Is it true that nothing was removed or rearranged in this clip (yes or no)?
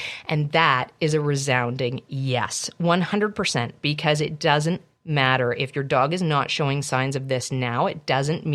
yes